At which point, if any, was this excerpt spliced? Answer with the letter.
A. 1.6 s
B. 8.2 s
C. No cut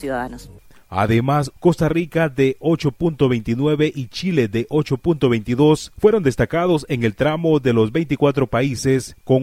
A